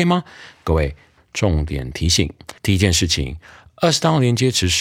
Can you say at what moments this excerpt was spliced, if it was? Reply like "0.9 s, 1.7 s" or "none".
1.2 s, 2.6 s